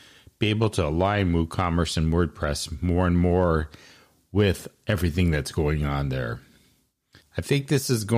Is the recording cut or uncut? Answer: cut